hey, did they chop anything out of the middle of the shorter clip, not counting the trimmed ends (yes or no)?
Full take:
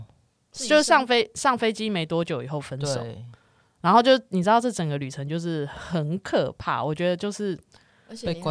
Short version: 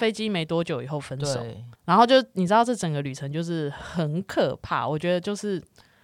yes